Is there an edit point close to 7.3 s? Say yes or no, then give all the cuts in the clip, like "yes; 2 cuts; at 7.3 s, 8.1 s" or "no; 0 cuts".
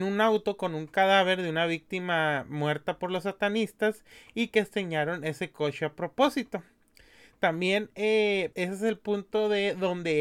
no; 1 cut; at 8.5 s